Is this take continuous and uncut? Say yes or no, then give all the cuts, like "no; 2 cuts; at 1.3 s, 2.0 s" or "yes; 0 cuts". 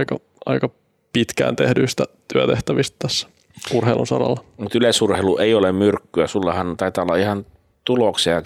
yes; 0 cuts